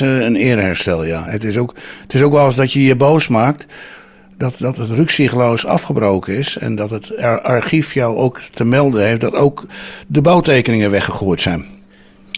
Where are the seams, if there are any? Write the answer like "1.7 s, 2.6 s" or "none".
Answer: 1.3 s